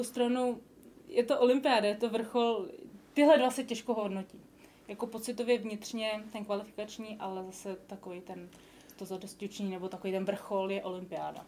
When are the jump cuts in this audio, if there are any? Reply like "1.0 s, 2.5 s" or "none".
7.2 s